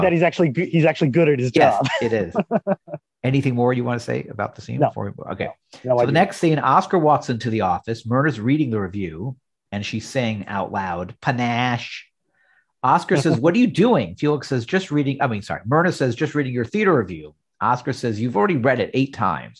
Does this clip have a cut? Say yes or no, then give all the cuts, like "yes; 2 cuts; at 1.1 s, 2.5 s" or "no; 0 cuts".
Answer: no; 0 cuts